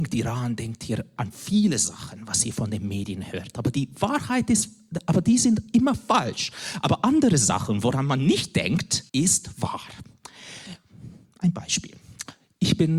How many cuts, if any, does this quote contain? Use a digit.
1